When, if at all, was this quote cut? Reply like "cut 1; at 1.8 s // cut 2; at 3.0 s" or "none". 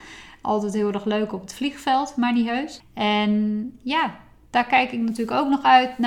cut 1; at 2.8 s